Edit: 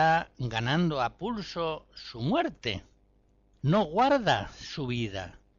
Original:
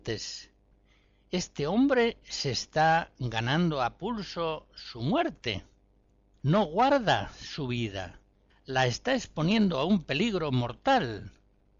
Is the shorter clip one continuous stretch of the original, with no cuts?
yes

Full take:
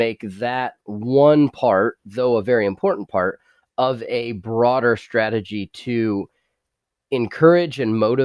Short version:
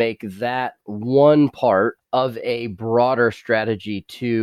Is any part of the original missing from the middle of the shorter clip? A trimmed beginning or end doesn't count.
yes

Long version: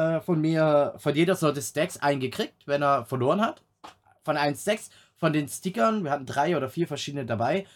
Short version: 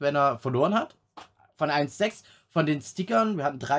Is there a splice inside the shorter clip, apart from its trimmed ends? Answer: no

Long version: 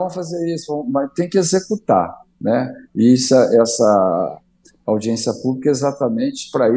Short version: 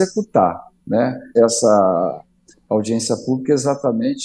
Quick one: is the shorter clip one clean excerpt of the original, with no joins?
no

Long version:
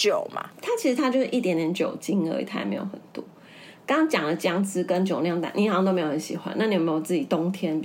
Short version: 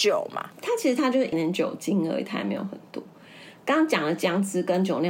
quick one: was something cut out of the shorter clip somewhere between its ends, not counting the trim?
yes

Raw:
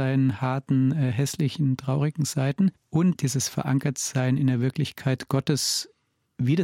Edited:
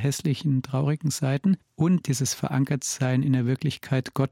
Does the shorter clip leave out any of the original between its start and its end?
no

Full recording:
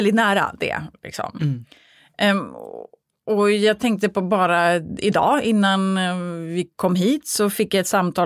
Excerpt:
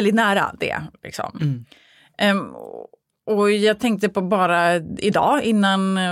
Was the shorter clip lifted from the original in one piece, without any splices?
yes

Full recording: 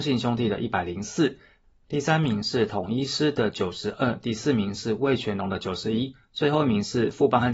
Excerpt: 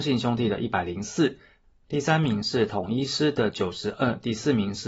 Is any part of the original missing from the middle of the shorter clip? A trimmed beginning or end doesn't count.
no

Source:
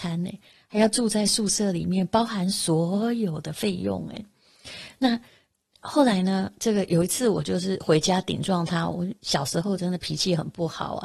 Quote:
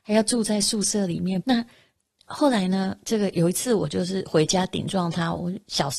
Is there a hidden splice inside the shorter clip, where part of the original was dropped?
yes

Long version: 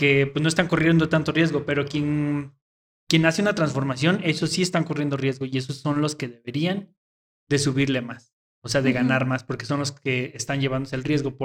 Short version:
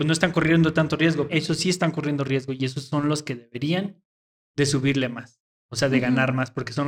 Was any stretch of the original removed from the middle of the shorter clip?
yes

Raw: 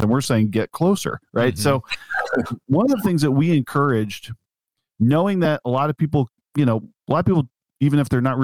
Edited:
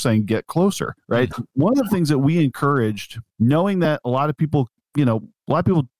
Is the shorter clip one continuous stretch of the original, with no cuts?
no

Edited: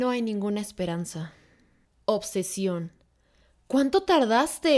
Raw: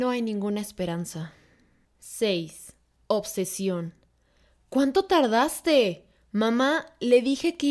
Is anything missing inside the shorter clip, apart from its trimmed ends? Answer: yes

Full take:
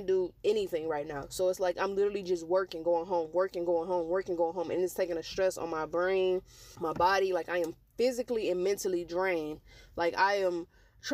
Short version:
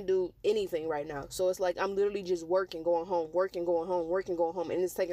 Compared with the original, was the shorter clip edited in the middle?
no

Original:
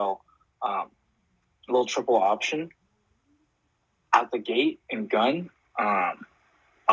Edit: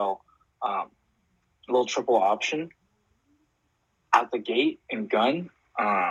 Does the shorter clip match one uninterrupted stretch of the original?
yes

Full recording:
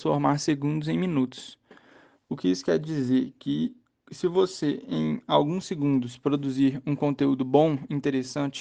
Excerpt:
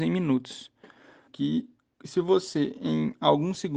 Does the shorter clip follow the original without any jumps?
no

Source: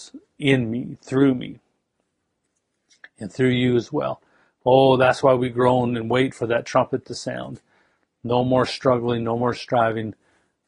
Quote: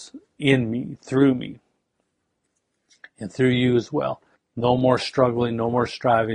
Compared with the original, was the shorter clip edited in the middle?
yes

